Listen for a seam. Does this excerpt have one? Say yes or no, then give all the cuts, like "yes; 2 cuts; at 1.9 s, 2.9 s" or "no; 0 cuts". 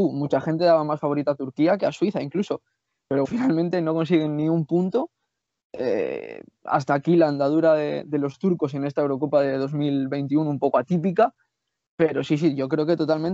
yes; 1 cut; at 3.2 s